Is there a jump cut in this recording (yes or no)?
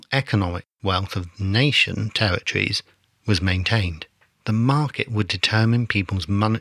yes